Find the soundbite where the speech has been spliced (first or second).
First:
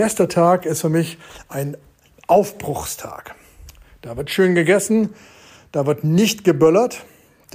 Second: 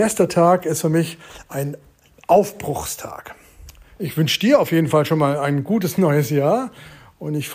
second